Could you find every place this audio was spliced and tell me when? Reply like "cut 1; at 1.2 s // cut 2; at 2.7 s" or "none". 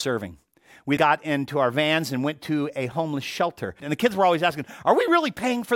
cut 1; at 1.0 s // cut 2; at 3.8 s